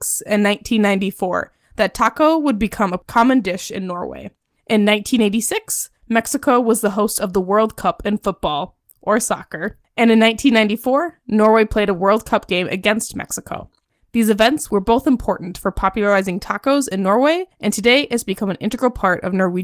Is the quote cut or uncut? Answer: uncut